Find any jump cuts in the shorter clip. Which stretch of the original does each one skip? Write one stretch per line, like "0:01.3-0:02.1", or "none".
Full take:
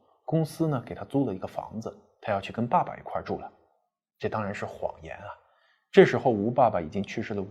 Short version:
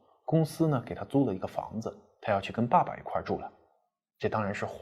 none